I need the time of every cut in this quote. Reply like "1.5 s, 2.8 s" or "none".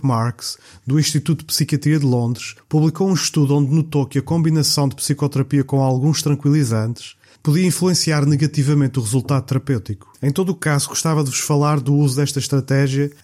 10.1 s